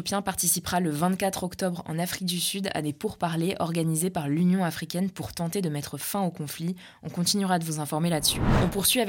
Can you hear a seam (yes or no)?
no